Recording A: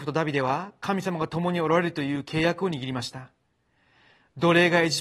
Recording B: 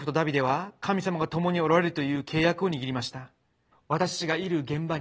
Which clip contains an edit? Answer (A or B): B